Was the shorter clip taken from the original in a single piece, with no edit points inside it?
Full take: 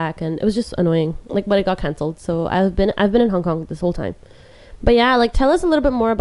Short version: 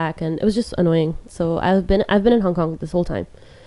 no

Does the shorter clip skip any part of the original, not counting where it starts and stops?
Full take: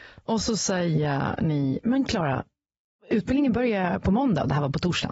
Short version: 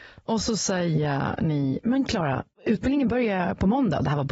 yes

